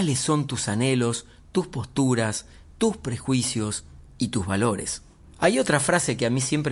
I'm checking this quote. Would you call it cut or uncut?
uncut